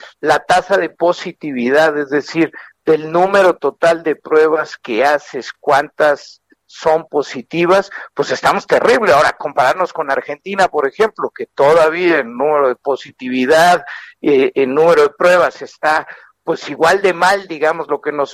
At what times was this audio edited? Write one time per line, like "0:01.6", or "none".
none